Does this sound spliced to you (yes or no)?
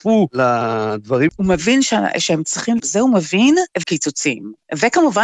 yes